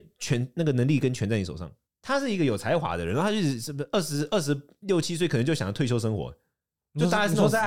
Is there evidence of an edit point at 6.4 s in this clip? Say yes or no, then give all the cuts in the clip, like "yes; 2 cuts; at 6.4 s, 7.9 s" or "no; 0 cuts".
no; 1 cut; at 1.9 s